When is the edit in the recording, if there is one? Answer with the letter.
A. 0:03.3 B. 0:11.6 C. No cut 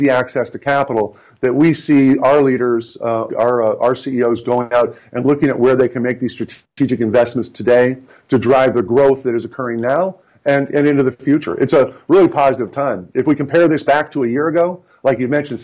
A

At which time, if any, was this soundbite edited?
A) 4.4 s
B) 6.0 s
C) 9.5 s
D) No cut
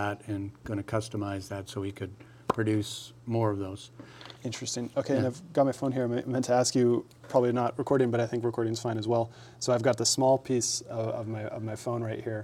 A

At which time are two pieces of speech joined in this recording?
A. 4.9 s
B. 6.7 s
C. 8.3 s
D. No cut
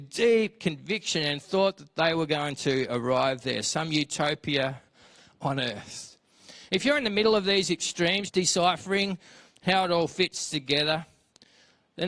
C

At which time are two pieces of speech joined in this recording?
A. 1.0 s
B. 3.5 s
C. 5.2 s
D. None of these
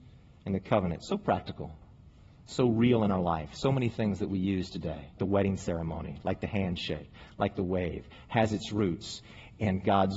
C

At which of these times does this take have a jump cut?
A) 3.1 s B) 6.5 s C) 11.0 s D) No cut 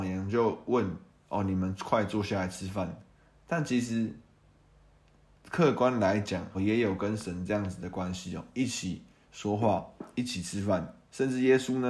B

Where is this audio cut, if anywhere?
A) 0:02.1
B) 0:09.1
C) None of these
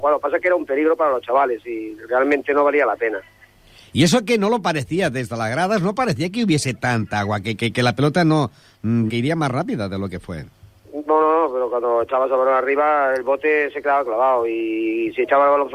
B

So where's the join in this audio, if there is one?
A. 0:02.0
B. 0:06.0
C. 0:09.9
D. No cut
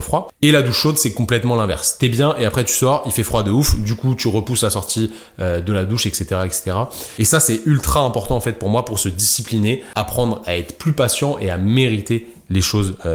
D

